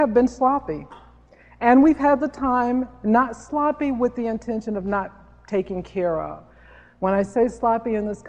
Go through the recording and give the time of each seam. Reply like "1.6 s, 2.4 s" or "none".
none